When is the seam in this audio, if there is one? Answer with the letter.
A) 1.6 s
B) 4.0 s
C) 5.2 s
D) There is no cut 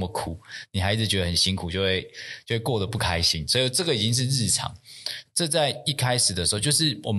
C